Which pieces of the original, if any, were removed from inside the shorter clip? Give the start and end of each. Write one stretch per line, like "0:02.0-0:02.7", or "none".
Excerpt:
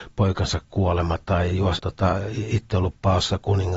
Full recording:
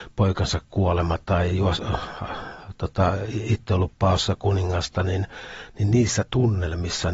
0:01.8-0:02.8